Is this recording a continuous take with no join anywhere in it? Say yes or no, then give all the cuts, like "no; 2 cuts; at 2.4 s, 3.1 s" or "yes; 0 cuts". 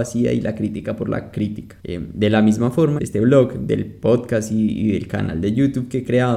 no; 2 cuts; at 1.8 s, 3.0 s